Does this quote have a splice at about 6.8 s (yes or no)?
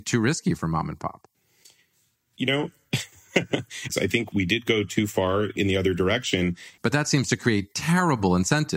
yes